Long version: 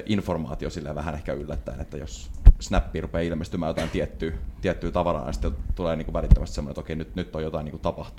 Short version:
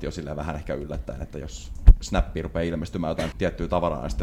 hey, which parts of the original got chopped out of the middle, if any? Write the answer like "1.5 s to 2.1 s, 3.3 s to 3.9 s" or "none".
3.9 s to 4.6 s